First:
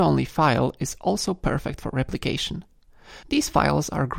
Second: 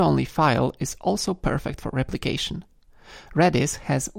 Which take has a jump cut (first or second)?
first